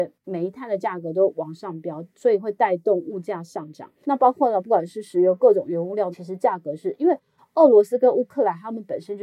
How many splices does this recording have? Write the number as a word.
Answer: two